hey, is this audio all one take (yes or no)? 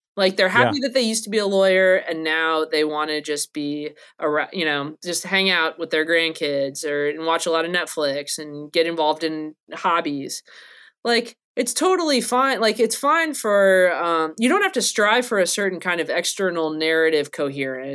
no